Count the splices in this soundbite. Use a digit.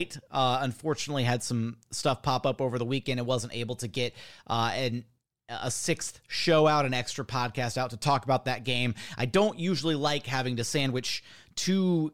0